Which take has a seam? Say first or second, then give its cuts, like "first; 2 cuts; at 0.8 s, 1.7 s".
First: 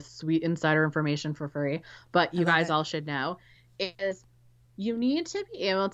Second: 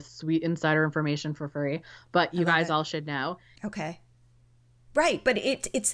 second; 1 cut; at 3.6 s